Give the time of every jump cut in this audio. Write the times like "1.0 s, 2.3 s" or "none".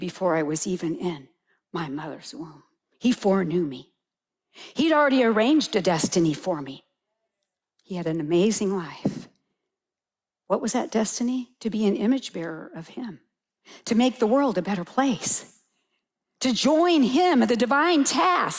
7.6 s